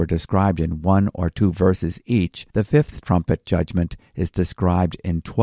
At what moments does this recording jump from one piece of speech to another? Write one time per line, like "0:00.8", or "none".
0:02.5

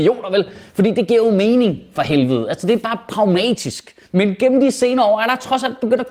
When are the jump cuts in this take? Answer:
0:04.0

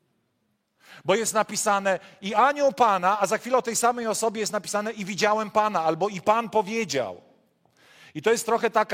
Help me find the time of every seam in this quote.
none

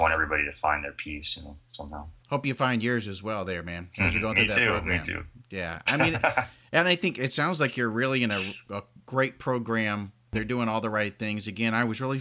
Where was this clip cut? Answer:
none

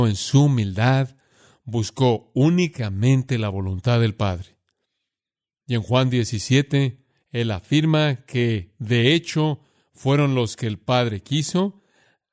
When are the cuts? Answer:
none

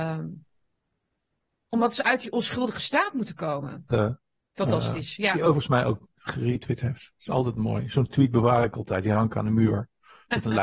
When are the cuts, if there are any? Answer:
0:03.9

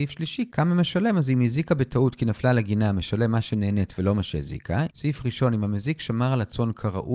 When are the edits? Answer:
0:04.9

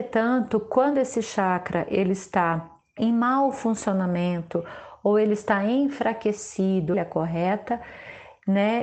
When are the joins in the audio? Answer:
0:03.0
0:06.9

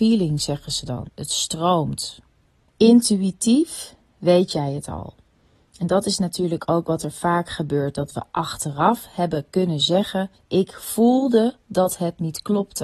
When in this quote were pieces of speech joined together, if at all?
0:01.1

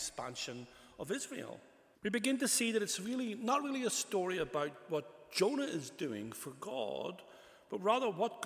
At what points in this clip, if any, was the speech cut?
0:01.9

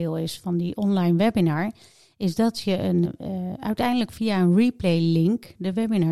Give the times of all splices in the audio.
0:03.0

